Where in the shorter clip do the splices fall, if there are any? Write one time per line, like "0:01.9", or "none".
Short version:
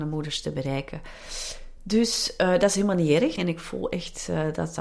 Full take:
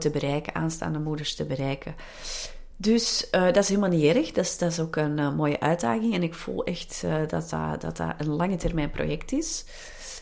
0:03.4